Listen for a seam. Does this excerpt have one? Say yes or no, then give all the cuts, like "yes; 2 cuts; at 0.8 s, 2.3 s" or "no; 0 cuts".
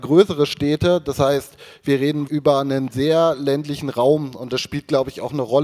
yes; 1 cut; at 2.3 s